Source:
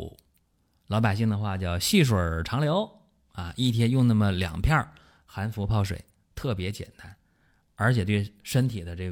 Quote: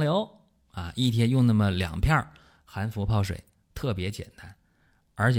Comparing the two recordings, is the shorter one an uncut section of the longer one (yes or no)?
yes